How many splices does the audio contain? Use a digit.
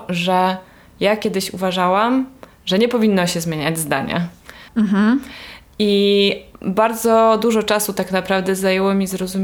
1